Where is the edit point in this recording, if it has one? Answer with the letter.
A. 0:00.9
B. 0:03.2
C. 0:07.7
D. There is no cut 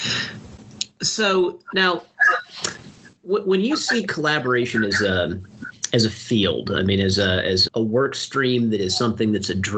C